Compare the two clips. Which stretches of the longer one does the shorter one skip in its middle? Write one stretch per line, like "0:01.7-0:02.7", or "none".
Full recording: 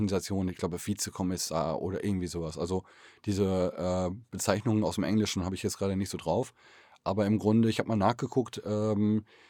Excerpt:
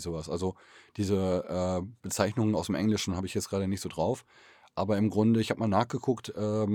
none